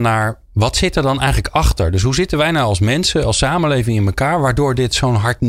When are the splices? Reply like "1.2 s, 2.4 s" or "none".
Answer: none

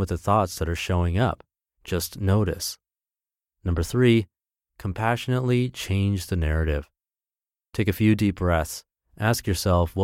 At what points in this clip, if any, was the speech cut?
1.6 s

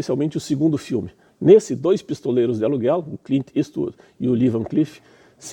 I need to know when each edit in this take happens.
none

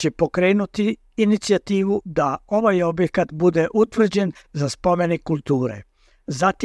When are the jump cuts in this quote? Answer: none

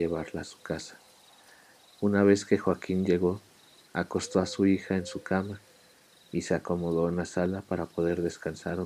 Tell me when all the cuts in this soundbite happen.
none

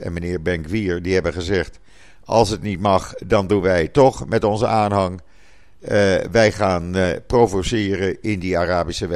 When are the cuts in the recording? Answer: none

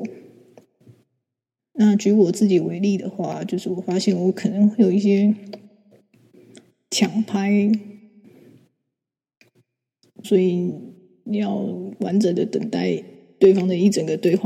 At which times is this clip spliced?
1.6 s, 10.2 s

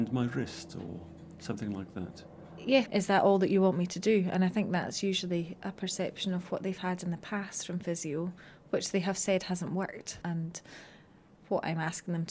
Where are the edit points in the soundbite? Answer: 2.8 s, 10.2 s

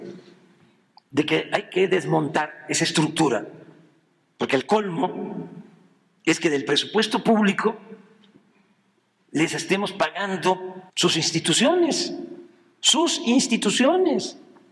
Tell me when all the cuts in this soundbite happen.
9.2 s, 10.9 s

